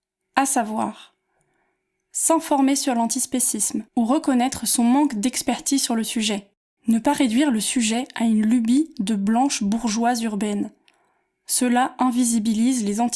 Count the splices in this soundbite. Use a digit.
2